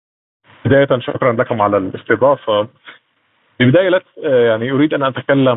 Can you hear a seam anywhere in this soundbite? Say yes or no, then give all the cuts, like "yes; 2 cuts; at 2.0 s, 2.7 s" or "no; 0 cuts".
no; 0 cuts